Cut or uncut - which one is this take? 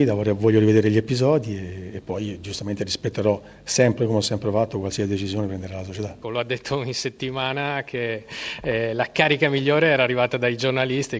cut